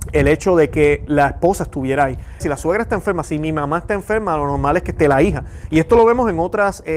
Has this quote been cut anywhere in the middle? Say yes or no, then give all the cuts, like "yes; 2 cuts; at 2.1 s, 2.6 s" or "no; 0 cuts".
yes; 1 cut; at 2.4 s